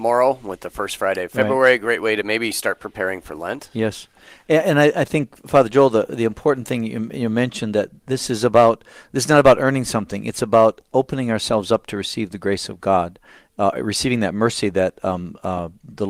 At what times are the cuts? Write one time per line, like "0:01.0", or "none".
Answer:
none